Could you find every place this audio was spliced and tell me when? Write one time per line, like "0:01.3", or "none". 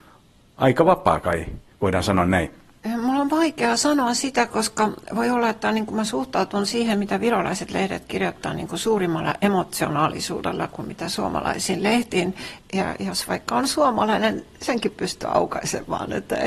0:12.6